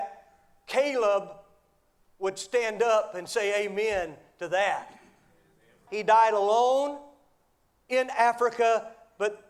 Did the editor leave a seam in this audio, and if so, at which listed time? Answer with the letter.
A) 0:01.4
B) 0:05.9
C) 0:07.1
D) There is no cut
B